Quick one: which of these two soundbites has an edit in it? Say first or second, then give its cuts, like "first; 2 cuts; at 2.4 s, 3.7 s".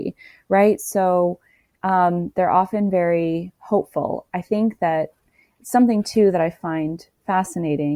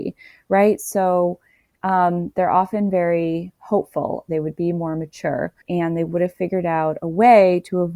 second; 2 cuts; at 4.3 s, 5.6 s